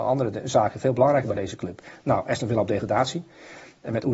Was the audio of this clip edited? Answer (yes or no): no